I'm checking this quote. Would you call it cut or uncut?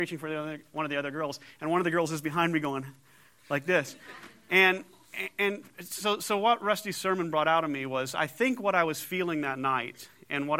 uncut